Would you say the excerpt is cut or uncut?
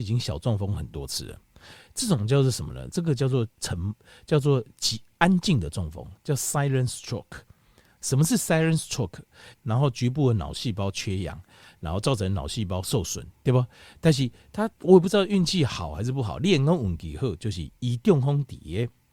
cut